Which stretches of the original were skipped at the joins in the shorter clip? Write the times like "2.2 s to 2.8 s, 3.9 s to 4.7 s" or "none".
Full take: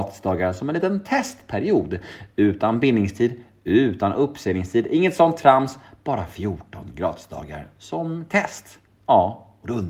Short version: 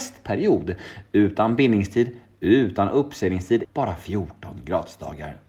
4.9 s to 5.9 s